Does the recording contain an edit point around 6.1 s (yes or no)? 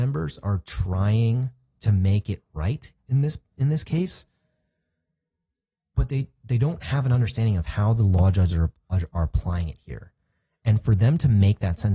no